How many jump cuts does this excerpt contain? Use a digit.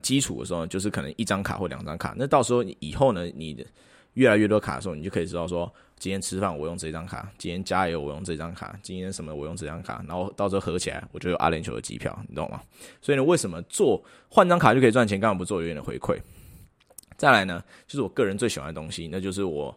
0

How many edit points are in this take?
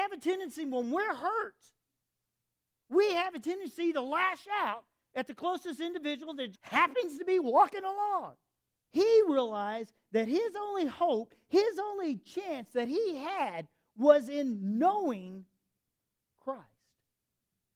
2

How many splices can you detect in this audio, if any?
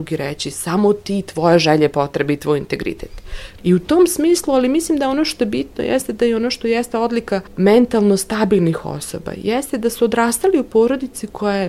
2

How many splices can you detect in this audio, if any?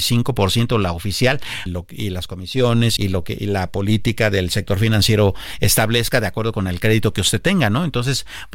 2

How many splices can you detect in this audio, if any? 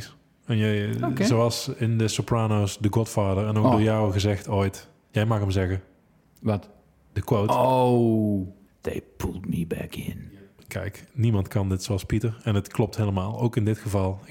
1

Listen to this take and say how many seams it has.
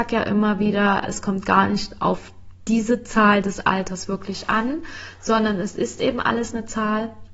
1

